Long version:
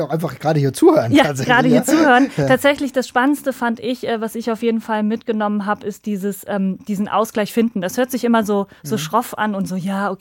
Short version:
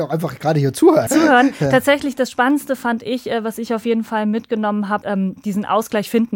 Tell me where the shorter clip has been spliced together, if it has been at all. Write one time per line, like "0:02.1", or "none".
0:01.1
0:05.0